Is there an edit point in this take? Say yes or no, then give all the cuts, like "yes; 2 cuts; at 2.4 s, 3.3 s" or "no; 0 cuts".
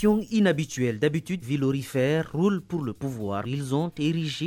yes; 2 cuts; at 1.4 s, 3.4 s